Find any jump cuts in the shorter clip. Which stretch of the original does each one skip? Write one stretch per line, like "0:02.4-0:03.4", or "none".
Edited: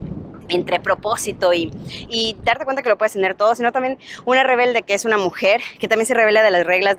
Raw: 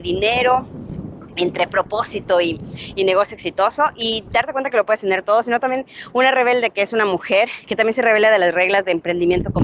0:02.9-0:03.9